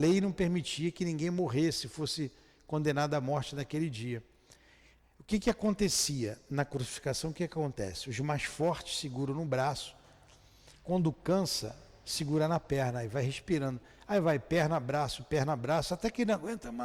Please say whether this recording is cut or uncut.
uncut